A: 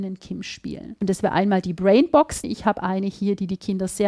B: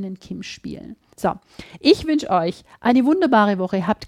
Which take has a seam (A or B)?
A